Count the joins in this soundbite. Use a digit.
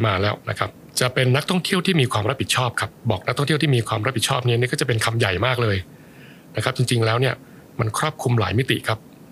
1